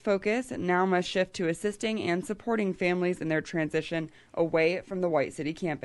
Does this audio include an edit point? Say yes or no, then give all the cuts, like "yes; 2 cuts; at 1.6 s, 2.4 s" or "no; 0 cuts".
no; 0 cuts